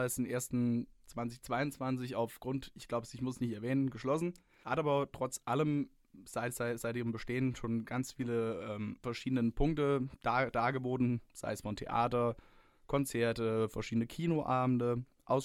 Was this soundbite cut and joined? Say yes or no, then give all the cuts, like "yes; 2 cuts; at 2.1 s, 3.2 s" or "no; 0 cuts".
no; 0 cuts